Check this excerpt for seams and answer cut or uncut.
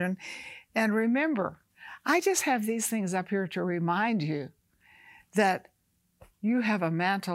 uncut